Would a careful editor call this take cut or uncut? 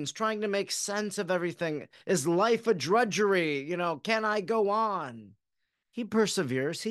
uncut